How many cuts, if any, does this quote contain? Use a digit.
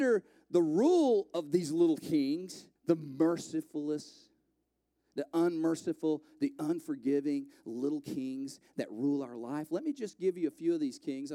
1